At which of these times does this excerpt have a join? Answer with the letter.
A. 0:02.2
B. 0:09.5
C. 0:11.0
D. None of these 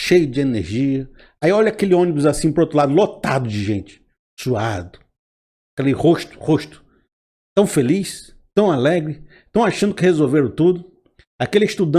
B